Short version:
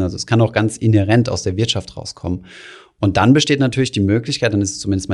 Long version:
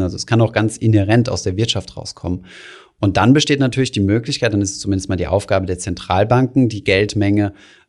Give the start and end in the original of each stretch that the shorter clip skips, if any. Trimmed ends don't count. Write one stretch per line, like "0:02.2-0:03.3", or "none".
none